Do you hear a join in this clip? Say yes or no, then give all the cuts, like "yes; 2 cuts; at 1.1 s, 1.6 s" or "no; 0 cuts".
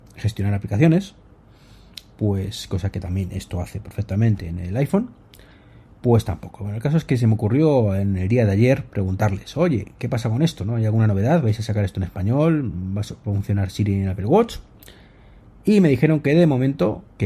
no; 0 cuts